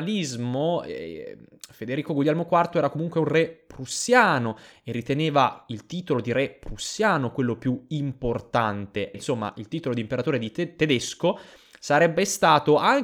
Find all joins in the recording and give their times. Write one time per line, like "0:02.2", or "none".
0:09.1